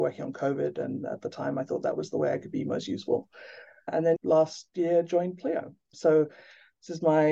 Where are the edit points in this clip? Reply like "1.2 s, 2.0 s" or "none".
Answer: 4.2 s